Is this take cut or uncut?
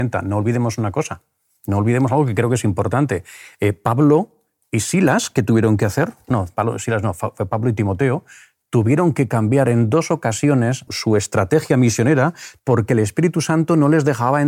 cut